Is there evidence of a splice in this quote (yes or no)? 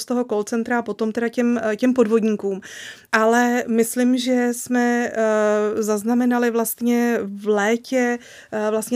yes